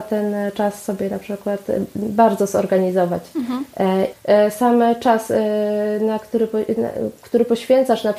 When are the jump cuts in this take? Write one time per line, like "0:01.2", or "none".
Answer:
0:04.1